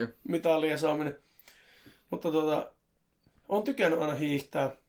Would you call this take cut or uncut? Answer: uncut